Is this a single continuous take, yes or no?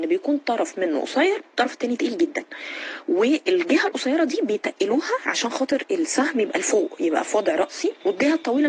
yes